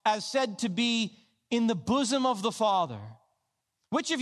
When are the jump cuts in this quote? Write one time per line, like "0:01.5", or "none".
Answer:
none